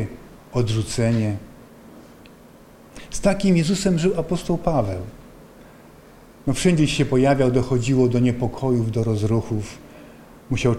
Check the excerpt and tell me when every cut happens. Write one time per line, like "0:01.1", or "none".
none